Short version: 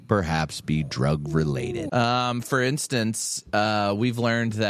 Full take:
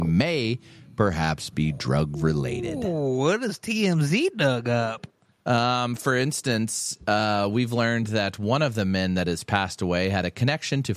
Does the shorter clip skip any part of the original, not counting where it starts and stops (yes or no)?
yes